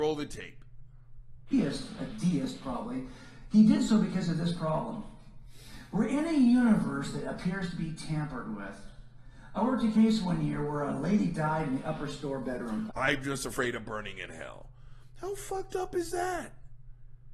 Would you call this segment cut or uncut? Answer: cut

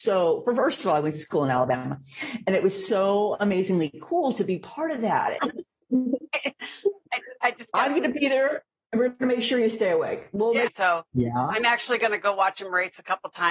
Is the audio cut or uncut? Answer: cut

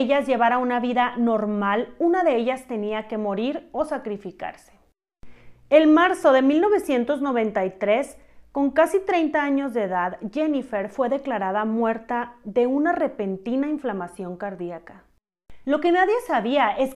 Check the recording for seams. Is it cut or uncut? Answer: cut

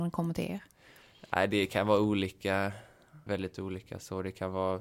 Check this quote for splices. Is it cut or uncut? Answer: cut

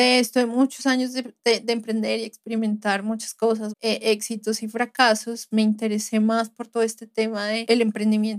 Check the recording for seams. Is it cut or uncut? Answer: cut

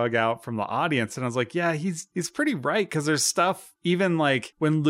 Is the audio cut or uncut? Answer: uncut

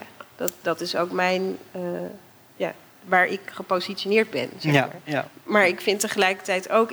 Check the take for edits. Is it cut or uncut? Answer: uncut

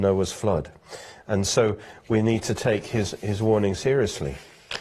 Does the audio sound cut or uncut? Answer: uncut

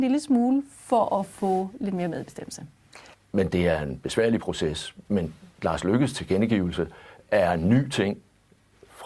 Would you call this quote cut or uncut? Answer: cut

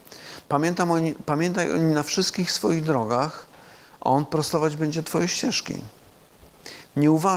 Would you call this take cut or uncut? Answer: uncut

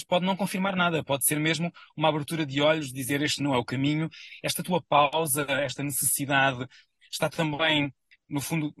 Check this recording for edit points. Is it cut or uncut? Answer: uncut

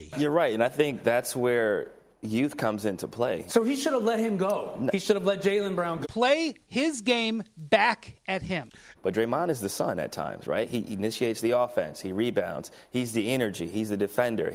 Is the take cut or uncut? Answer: cut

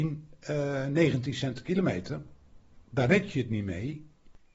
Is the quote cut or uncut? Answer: uncut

